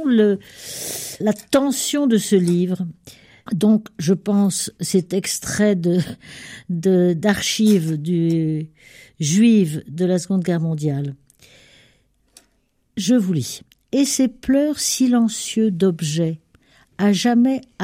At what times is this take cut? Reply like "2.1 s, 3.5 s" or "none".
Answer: 1.2 s, 3.5 s